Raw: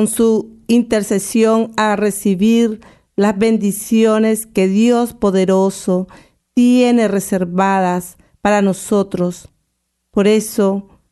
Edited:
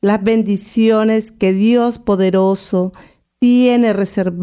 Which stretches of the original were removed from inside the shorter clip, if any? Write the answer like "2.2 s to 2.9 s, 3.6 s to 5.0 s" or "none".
none

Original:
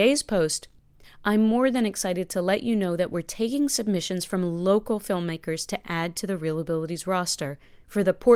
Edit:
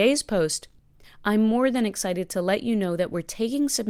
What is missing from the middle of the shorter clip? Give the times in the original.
none

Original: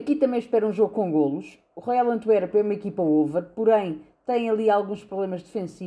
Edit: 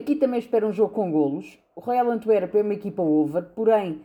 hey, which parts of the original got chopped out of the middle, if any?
none

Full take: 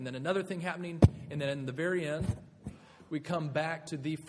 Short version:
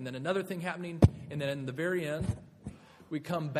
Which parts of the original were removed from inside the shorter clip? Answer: none

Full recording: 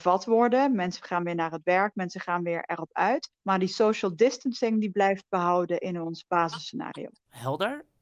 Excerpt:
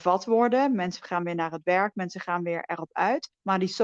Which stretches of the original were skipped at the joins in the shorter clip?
none

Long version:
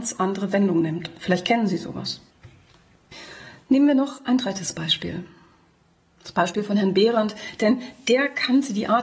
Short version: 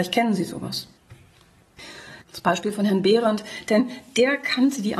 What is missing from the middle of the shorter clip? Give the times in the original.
3.5 s to 6.1 s

